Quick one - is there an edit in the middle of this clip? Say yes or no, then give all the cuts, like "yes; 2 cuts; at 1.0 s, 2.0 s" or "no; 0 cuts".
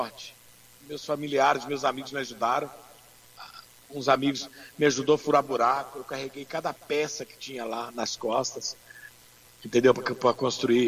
no; 0 cuts